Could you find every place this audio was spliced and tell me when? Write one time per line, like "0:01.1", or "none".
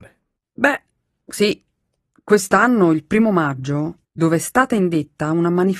0:04.0